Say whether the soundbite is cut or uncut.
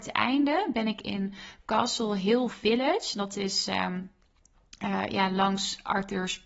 uncut